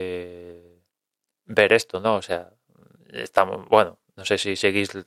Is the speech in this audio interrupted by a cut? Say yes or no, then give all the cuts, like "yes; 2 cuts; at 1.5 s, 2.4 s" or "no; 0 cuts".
no; 0 cuts